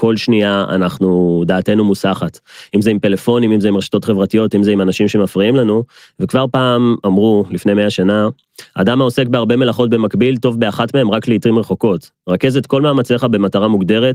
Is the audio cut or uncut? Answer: uncut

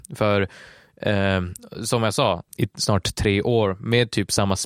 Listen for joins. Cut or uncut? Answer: cut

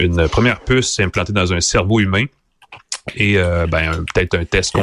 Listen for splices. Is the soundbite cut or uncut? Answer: uncut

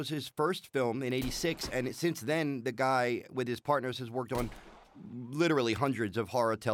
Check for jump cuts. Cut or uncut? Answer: uncut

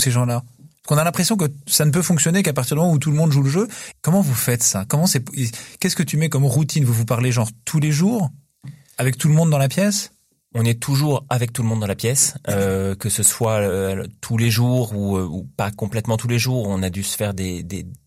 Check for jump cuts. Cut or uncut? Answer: cut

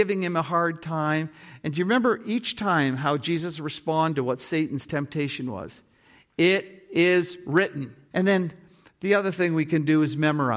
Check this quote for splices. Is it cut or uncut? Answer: cut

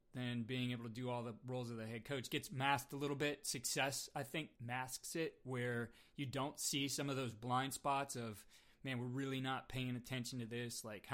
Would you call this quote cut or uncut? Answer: cut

